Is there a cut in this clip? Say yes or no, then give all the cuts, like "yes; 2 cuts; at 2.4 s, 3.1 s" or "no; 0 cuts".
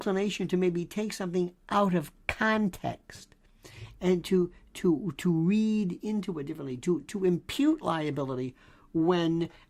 no; 0 cuts